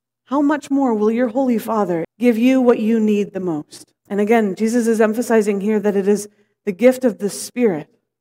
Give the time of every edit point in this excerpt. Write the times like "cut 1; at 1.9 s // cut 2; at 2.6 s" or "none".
cut 1; at 2.0 s // cut 2; at 4.0 s

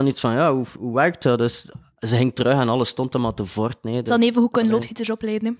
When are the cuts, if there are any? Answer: none

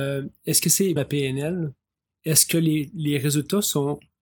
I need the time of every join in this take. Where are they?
cut 1; at 1.0 s

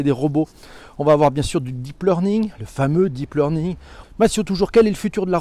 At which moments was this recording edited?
cut 1; at 4.0 s

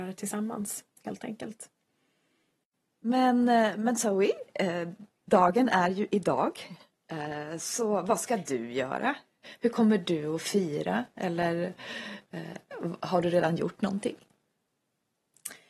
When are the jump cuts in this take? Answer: none

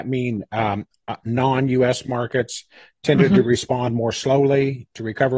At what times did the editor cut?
none

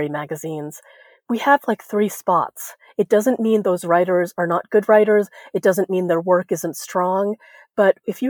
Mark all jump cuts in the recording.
none

